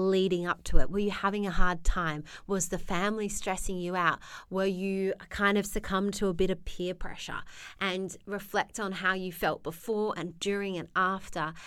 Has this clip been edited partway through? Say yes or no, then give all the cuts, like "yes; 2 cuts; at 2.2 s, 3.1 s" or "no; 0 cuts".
no; 0 cuts